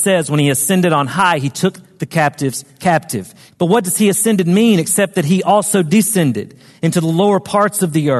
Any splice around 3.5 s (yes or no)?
yes